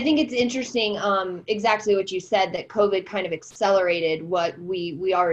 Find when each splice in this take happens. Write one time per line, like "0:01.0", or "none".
none